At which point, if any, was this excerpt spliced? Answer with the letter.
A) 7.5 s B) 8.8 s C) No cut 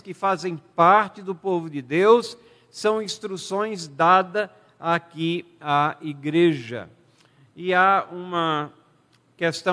C